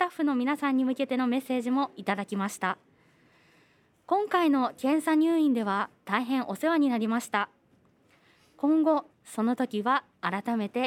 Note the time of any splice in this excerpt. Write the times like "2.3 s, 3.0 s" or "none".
9.1 s